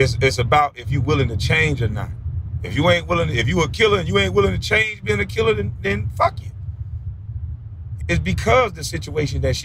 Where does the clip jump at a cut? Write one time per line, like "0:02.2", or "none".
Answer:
0:08.0